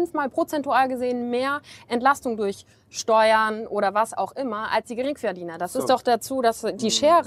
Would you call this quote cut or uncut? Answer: uncut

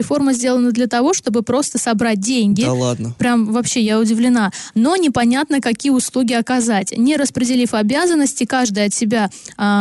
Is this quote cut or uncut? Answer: uncut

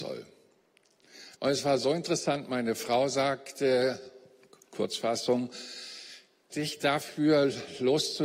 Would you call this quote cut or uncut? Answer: cut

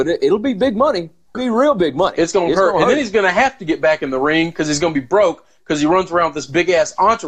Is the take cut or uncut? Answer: cut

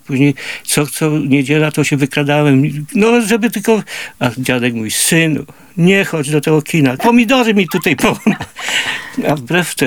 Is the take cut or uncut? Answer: cut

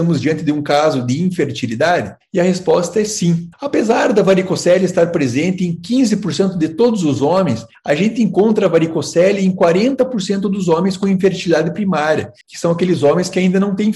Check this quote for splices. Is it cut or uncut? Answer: cut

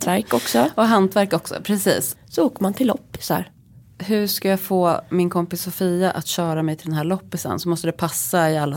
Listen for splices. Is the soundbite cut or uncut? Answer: cut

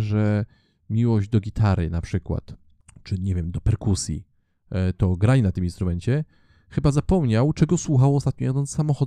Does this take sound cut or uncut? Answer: uncut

